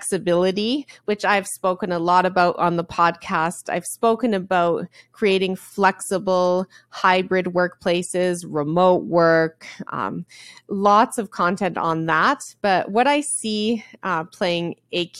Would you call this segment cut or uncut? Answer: uncut